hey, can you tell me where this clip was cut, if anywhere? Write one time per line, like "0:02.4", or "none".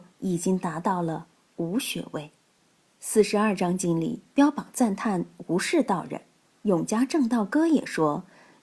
none